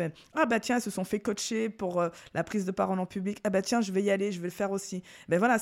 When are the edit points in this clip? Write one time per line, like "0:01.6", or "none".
none